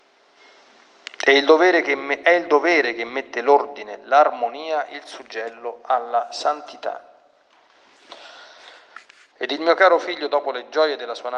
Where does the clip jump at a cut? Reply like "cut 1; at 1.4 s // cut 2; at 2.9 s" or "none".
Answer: cut 1; at 9.3 s